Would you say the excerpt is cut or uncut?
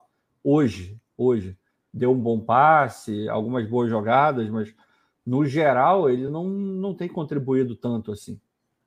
uncut